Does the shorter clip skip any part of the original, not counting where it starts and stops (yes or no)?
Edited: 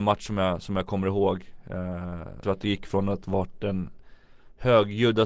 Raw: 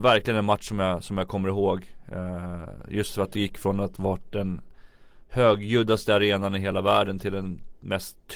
yes